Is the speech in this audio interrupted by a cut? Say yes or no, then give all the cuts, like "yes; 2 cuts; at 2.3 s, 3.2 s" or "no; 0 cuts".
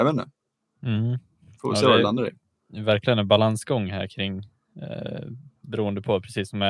no; 0 cuts